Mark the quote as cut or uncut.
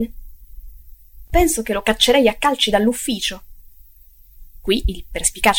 cut